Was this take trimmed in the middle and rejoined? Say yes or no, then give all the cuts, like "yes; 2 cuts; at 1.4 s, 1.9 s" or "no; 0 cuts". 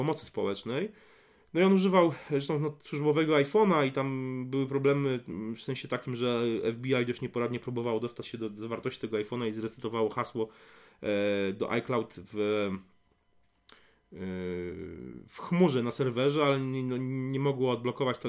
no; 0 cuts